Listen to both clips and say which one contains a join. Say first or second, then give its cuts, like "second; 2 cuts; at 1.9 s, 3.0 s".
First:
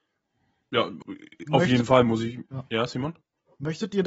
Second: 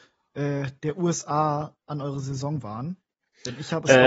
first; 1 cut; at 1.0 s